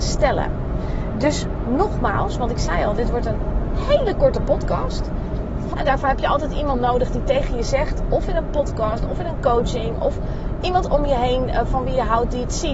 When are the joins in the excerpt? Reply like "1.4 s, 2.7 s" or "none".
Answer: 5.7 s